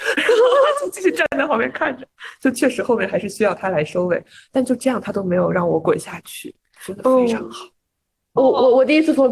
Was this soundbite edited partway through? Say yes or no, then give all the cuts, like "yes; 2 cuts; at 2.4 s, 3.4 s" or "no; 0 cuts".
no; 0 cuts